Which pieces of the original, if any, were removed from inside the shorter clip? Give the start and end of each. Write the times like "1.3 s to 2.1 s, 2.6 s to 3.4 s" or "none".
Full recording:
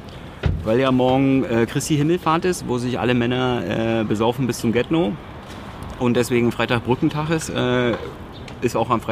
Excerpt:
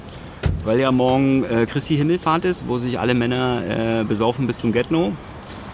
none